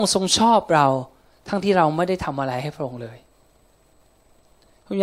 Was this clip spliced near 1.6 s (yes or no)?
yes